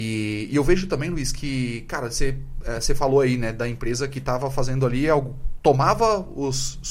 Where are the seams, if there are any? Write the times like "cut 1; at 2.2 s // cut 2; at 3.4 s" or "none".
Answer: none